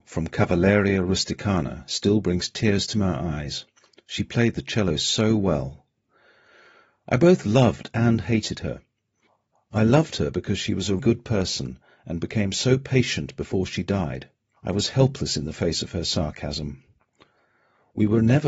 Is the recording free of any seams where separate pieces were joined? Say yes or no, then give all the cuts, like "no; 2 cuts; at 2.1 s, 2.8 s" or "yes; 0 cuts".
no; 2 cuts; at 11.0 s, 14.6 s